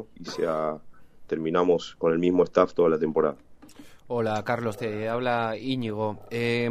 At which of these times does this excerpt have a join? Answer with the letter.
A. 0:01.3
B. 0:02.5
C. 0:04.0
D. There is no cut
A